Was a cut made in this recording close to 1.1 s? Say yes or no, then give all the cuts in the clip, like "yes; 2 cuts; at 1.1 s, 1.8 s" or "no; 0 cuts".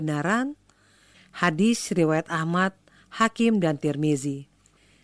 yes; 1 cut; at 1.1 s